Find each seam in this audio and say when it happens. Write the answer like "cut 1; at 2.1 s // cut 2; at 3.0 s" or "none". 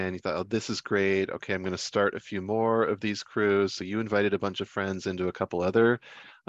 none